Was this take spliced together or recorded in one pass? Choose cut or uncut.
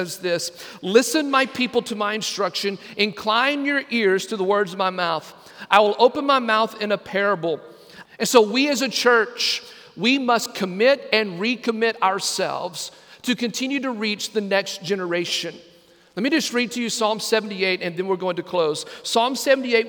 cut